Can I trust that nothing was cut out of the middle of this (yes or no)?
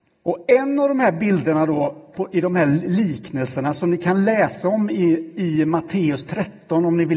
yes